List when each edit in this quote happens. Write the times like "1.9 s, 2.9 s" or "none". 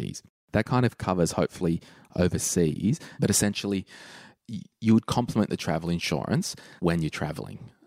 3.1 s, 4.3 s, 6.8 s